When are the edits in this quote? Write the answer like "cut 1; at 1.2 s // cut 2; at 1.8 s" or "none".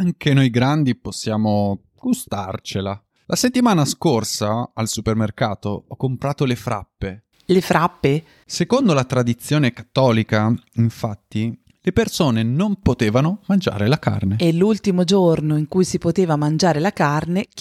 cut 1; at 8.4 s // cut 2; at 11.7 s